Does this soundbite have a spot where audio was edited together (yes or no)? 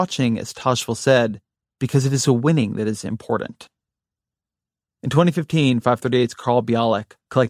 yes